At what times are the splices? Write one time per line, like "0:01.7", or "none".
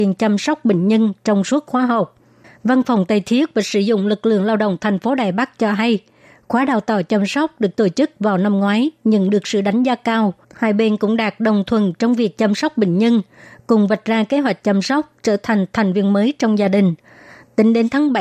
0:10.4